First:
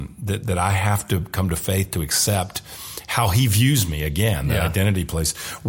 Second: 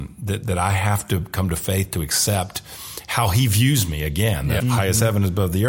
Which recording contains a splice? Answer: second; 1 cut; at 4.6 s

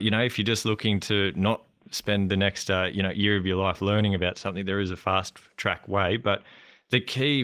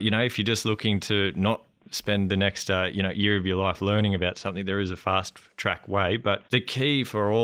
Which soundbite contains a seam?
second; 1 cut; at 6.4 s

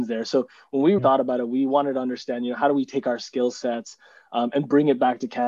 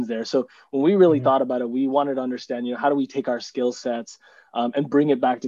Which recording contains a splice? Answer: first; 1 cut; at 1.0 s

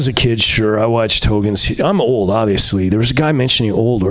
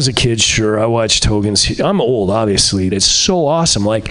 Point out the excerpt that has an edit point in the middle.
second; 1 cut; at 2.9 s

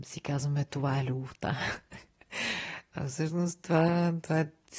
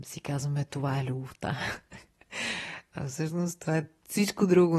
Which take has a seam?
second; 1 cut; at 3.6 s

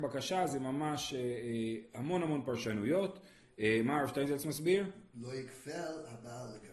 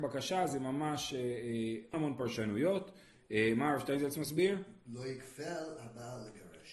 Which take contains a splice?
second; 1 cut; at 1.9 s

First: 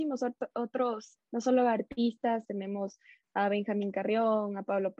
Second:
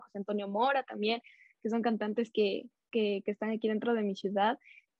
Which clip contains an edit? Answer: first; 2 cuts; at 1.2 s, 2.4 s

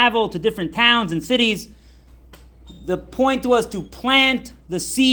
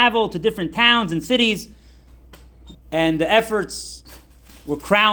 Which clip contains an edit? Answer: second; 1 cut; at 2.7 s

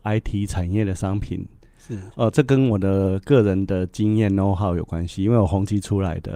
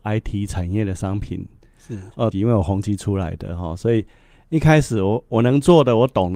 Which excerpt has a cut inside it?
second; 1 cut; at 2.3 s

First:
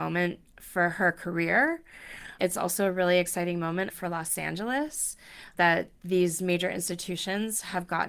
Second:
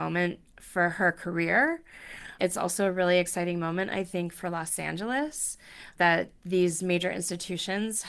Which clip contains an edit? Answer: first; 1 cut; at 3.9 s

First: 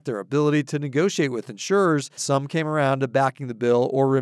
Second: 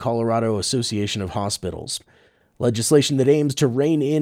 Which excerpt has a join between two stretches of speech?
first; 1 cut; at 2.2 s

